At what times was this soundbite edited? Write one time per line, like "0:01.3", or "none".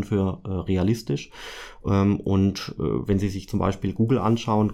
none